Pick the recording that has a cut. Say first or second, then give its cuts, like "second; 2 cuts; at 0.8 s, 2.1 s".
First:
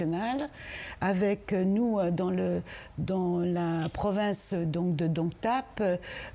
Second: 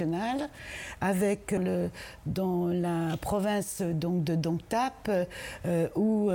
second; 1 cut; at 1.6 s